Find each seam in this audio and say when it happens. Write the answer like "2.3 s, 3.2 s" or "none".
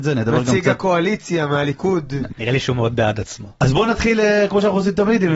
2.3 s